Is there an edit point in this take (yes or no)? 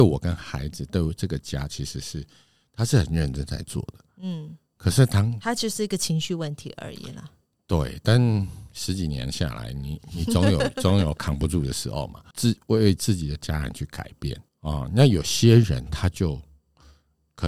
yes